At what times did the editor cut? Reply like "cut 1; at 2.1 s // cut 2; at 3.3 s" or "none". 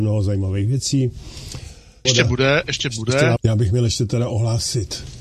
cut 1; at 2.0 s // cut 2; at 3.4 s